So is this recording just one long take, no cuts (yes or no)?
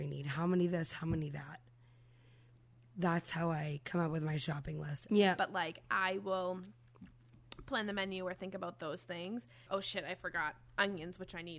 no